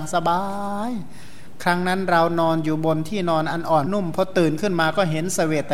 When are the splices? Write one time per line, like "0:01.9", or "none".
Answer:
0:03.9